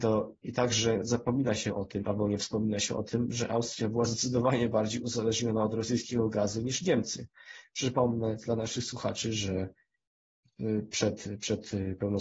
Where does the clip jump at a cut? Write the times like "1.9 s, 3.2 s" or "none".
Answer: none